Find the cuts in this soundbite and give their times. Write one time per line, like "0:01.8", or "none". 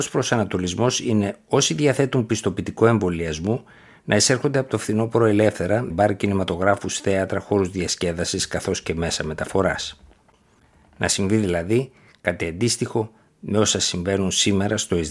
0:05.9